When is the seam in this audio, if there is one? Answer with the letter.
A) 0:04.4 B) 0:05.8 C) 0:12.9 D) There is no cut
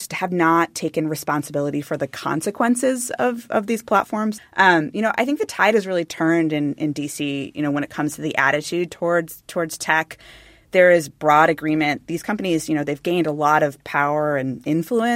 A